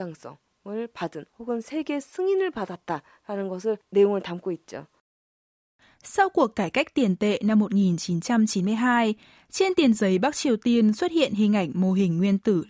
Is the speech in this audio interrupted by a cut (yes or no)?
no